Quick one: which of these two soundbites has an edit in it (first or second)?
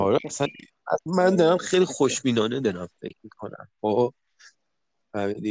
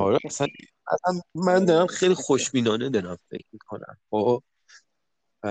first